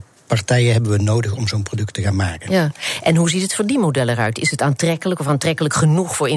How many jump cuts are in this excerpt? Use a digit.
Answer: 0